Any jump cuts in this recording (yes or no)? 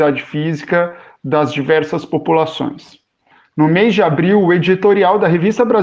no